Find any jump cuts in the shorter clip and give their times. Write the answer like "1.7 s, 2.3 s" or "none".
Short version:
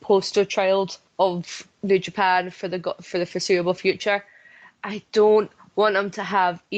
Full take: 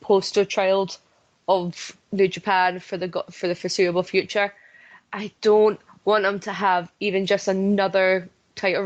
1.1 s